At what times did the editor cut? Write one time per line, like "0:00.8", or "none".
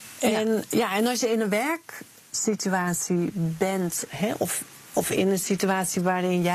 none